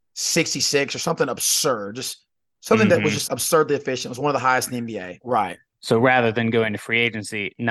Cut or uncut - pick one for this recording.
cut